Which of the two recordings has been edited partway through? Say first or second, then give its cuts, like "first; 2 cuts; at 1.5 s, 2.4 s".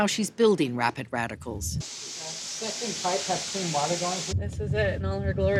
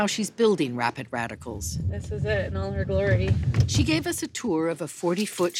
first; 2 cuts; at 1.8 s, 4.3 s